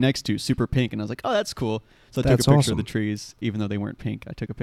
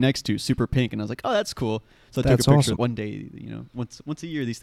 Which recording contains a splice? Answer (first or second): second